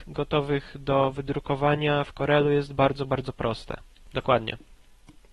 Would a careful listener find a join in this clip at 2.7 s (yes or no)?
no